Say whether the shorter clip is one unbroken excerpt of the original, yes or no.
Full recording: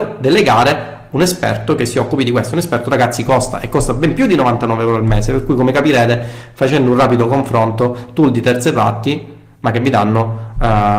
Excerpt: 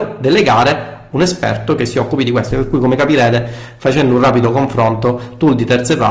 no